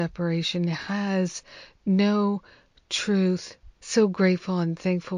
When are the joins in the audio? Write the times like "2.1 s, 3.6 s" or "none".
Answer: 3.8 s